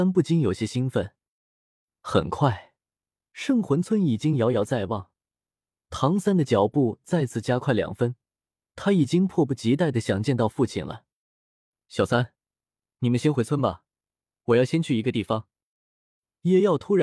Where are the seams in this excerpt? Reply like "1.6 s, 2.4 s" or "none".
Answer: none